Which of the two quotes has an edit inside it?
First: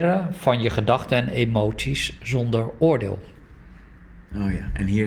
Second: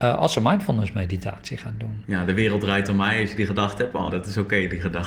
second; 1 cut; at 4.1 s

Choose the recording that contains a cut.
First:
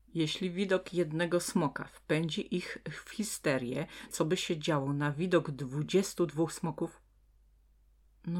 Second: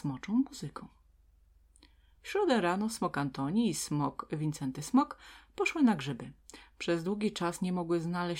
first; 1 cut; at 4.1 s

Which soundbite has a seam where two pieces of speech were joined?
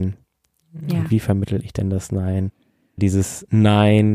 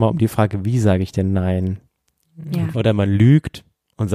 second; 1 cut; at 2.7 s

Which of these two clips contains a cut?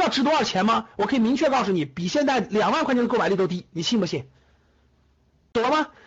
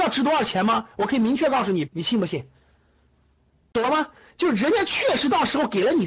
second; 1 cut; at 1.9 s

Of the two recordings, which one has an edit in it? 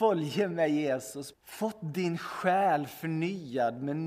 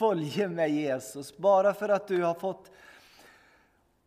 first; 1 cut; at 1.3 s

